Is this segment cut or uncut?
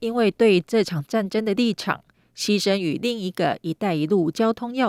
uncut